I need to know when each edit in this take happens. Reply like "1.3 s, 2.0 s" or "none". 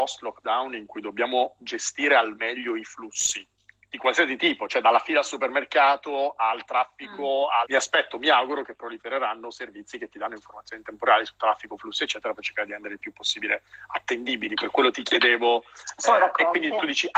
7.6 s